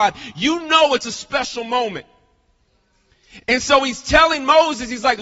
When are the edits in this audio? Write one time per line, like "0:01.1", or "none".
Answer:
none